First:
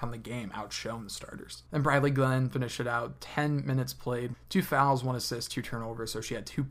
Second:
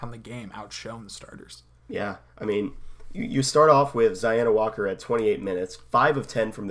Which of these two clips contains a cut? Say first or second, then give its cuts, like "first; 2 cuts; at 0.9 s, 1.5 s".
first; 2 cuts; at 1.7 s, 4.3 s